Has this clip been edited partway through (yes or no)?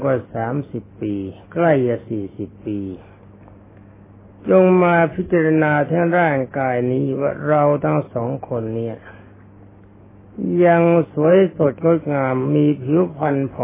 no